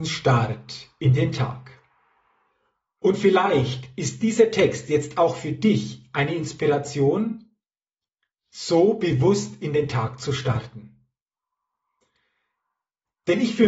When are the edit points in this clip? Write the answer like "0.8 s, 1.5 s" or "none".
none